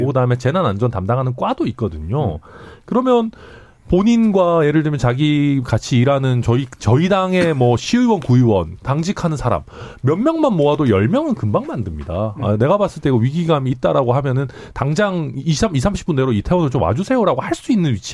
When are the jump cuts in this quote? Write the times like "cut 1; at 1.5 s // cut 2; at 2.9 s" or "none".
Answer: none